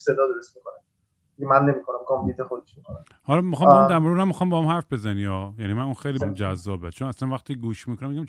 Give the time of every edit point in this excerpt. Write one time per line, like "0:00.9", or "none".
0:06.2